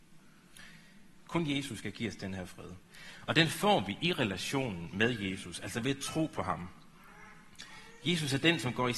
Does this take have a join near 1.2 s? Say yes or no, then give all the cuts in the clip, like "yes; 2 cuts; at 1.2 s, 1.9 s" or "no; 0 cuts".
yes; 1 cut; at 1.2 s